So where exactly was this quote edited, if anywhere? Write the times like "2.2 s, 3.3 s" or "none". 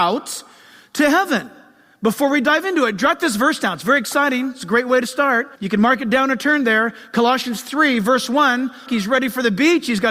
5.6 s, 8.9 s